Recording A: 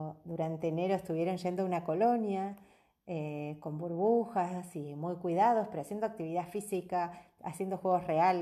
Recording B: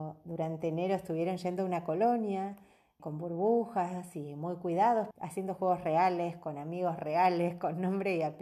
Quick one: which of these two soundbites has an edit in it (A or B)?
B